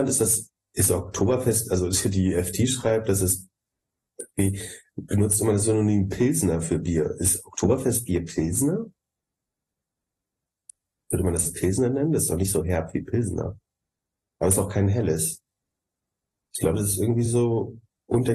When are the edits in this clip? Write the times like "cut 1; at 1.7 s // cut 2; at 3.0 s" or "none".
none